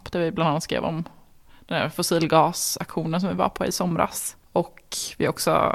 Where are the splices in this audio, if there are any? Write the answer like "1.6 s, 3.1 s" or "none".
4.4 s